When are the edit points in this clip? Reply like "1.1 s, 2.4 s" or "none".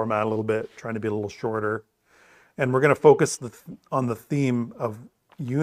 none